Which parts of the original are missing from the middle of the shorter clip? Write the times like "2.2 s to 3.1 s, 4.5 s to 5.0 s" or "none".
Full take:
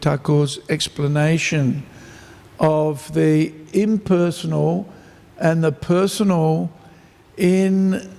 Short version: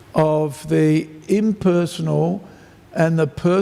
none

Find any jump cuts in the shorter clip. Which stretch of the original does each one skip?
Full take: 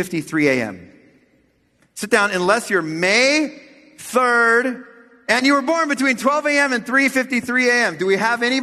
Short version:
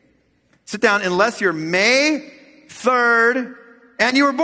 none

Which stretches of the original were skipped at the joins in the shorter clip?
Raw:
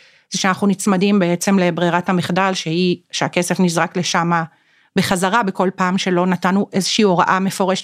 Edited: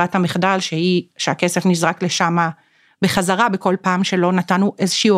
none

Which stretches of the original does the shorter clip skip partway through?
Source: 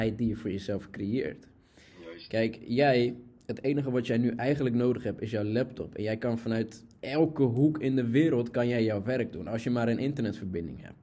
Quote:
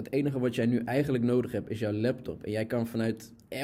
none

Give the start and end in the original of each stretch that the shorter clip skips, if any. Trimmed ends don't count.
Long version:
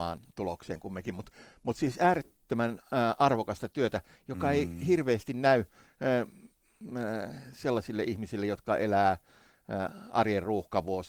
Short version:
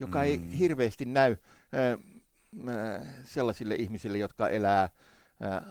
none

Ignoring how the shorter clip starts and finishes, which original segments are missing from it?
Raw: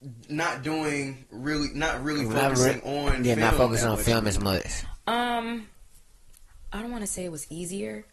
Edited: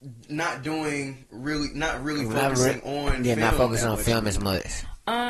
none

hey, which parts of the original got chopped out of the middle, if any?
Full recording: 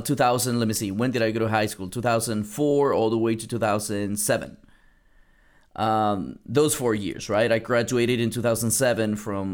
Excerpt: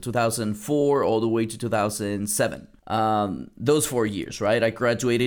4.7 s to 5.7 s

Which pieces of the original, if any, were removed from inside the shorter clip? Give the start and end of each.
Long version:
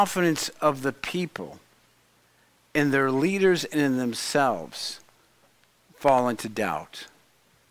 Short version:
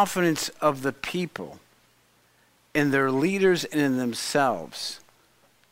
none

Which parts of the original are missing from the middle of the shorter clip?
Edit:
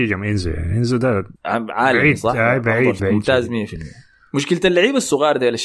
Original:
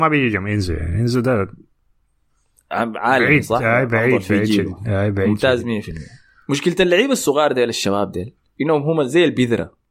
1.6 s to 2.6 s, 4.3 s to 5.1 s

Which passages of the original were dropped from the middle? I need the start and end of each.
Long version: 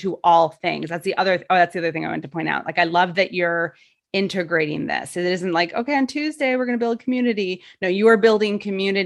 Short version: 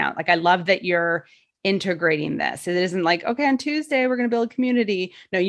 none

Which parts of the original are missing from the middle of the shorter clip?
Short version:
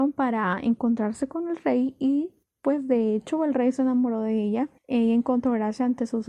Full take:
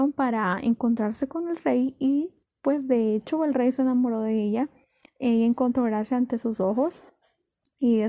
4.8 s to 5.1 s

